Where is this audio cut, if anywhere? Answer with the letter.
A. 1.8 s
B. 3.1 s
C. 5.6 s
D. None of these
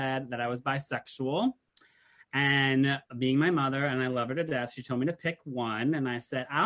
B